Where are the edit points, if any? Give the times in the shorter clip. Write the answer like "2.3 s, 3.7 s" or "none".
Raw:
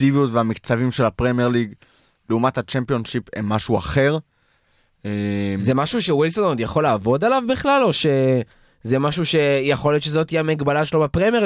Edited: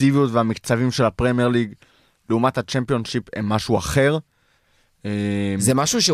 none